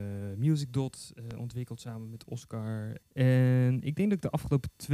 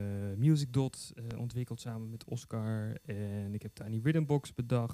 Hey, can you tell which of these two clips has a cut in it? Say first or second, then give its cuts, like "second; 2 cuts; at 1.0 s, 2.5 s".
first; 1 cut; at 3.0 s